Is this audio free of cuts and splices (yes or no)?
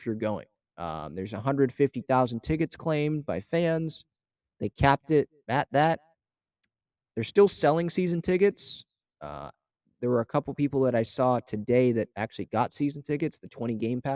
yes